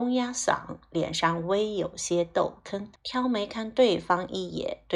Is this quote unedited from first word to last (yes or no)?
no